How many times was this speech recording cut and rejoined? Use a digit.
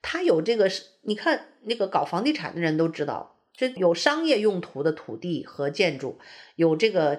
1